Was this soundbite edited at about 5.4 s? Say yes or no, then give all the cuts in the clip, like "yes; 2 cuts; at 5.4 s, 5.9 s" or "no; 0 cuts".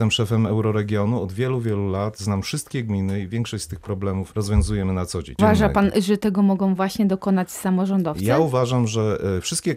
yes; 1 cut; at 5.4 s